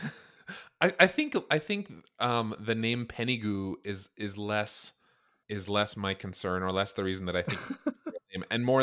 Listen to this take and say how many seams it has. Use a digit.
1